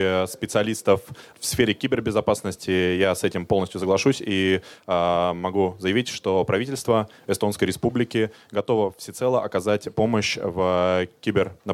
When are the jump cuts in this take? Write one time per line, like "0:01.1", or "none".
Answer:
0:01.3